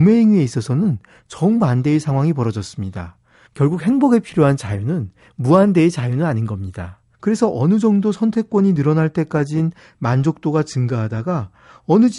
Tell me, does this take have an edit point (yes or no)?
yes